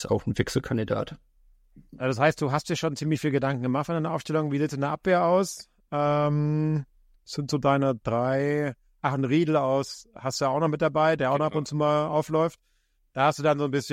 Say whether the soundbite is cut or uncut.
cut